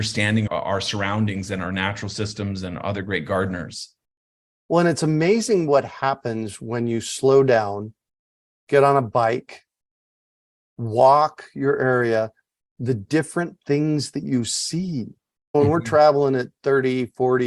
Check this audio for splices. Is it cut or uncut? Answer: uncut